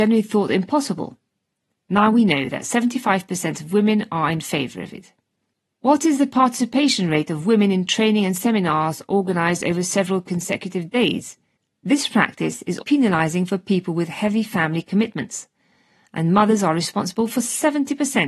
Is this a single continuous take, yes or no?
no